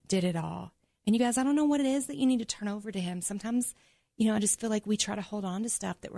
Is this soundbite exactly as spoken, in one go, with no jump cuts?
yes; 0 cuts

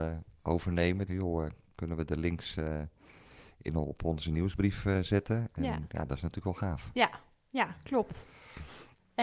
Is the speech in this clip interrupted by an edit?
yes; 1 cut; at 1.1 s

